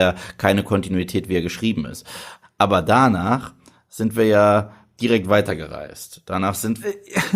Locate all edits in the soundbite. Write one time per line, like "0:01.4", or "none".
0:02.4